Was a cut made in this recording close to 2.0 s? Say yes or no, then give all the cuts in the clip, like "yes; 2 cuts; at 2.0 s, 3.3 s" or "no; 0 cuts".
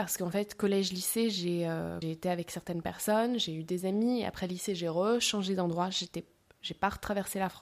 yes; 1 cut; at 2.0 s